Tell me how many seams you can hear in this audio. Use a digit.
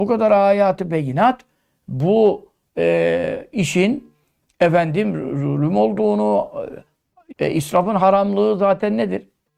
1